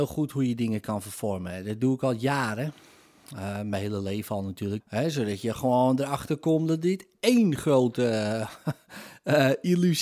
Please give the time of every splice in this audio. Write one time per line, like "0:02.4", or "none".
0:04.8

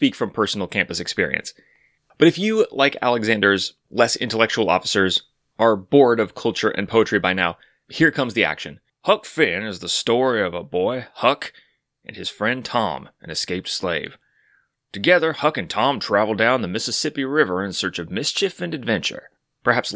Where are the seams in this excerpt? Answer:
0:08.9

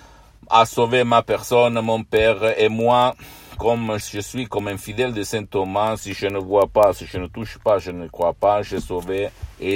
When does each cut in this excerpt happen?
0:04.0

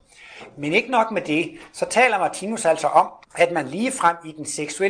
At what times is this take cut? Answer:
0:03.2

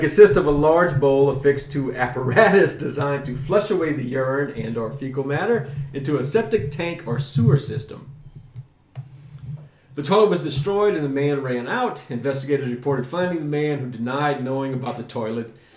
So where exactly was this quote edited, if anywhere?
none

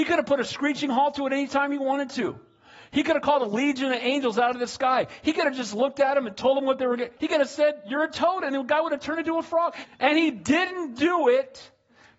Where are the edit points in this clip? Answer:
0:07.2
0:09.8

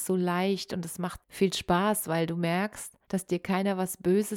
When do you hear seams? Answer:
0:01.2
0:03.0

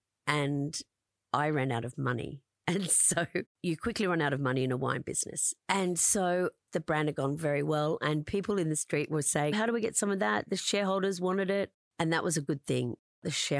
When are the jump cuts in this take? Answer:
0:03.5
0:05.6
0:09.5

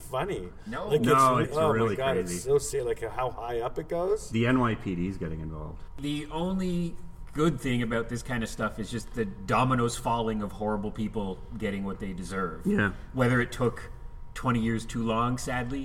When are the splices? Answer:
0:01.4

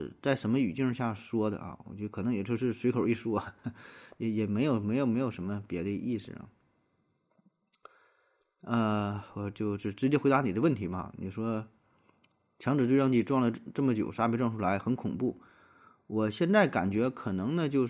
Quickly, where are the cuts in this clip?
none

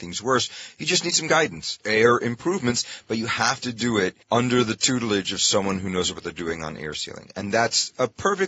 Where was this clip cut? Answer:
0:01.8
0:04.2

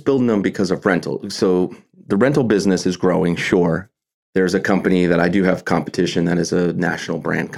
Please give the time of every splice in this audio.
none

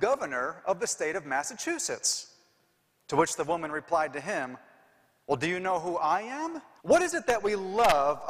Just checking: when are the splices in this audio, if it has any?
0:06.8

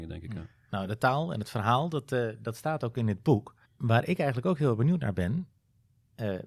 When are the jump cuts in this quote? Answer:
0:03.6

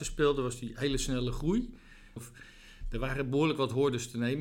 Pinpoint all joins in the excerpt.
0:02.2

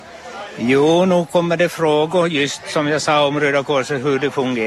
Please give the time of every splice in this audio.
none

